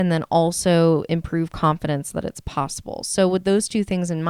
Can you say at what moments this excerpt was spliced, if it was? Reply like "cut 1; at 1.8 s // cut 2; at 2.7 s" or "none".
none